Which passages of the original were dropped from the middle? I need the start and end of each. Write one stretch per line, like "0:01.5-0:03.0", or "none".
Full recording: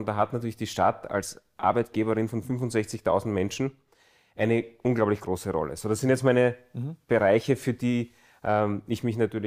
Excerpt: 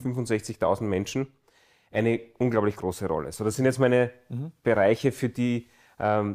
none